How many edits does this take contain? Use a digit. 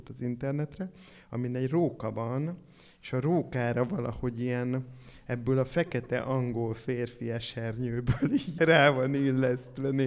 1